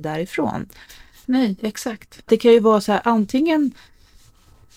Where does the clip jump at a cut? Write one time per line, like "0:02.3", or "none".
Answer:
0:01.2